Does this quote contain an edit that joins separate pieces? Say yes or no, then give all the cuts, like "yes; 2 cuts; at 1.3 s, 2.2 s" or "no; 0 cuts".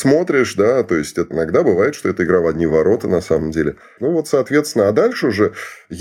yes; 1 cut; at 4.0 s